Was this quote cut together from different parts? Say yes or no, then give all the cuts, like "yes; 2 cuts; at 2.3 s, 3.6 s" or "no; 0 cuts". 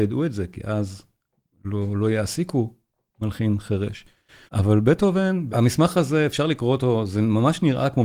yes; 2 cuts; at 4.5 s, 5.5 s